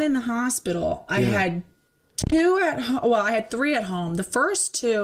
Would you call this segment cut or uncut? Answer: uncut